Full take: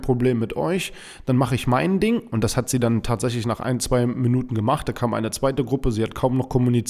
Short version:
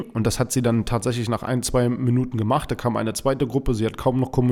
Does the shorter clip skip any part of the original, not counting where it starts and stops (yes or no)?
no